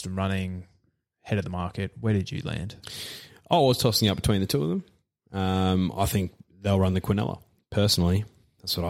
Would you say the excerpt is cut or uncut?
uncut